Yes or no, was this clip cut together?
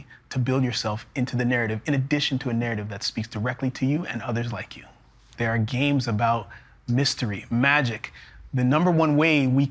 yes